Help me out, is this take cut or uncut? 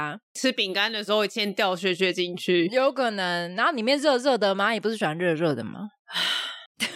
uncut